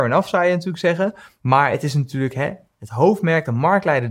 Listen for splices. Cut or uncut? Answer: uncut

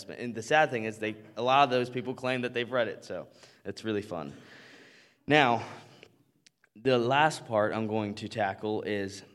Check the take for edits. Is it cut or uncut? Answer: uncut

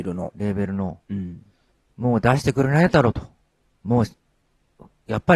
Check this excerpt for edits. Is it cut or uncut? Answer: uncut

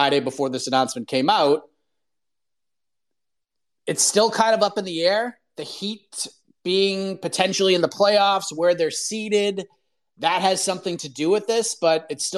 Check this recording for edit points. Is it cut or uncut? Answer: uncut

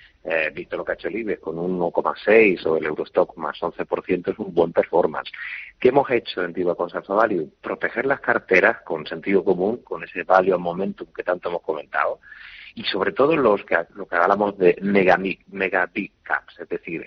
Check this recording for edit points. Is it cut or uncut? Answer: cut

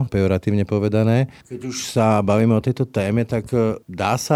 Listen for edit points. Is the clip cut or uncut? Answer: cut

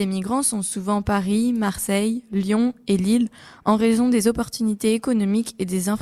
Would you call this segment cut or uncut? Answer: uncut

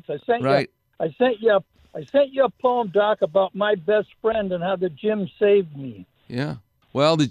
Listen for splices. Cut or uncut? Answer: uncut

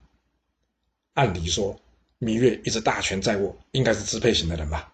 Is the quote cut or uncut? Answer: uncut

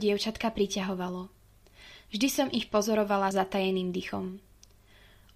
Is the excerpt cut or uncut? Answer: cut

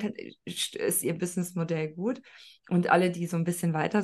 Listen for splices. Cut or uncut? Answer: uncut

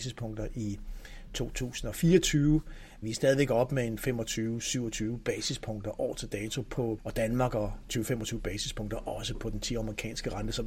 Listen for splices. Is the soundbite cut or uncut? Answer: cut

